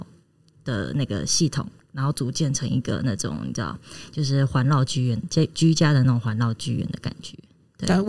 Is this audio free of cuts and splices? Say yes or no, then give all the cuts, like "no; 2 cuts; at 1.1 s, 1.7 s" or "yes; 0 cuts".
yes; 0 cuts